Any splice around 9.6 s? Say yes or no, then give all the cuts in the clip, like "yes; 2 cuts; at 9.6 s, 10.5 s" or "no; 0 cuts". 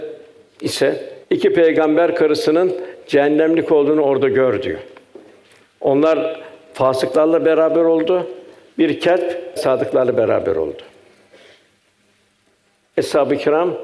yes; 2 cuts; at 1.2 s, 9.6 s